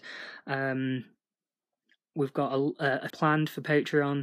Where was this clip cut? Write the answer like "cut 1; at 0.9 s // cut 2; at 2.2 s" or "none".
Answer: cut 1; at 3.1 s